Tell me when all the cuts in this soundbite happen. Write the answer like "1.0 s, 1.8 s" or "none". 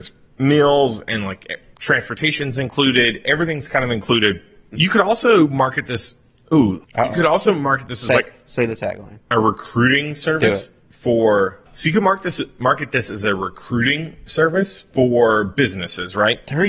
4.7 s, 11.7 s

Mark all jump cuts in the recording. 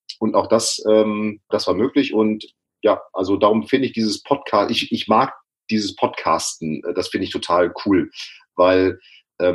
1.5 s

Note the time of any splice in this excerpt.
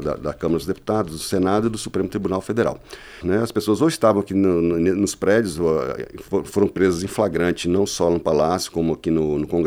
3.2 s

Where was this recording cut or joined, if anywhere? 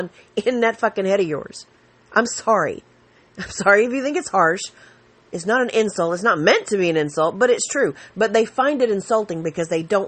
none

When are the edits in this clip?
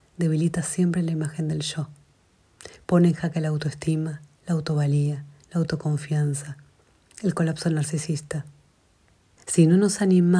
9.4 s

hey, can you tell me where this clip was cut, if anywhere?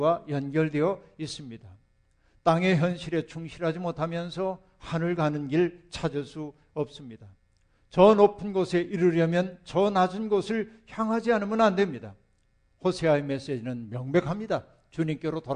none

